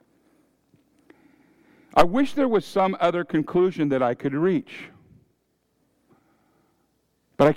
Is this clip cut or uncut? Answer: uncut